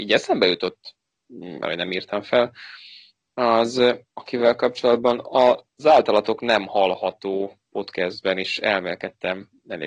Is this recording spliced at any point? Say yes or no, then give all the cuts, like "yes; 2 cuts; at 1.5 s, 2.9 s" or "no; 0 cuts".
yes; 1 cut; at 1.6 s